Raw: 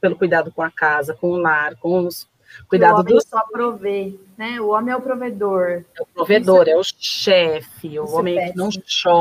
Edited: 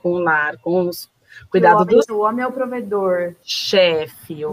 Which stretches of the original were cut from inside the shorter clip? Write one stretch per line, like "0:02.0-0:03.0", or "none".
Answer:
0:03.3-0:04.6
0:05.9-0:06.9